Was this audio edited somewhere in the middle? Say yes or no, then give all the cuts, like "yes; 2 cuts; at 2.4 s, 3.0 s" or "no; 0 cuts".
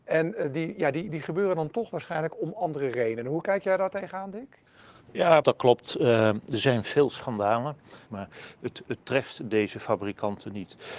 yes; 2 cuts; at 5.4 s, 8.1 s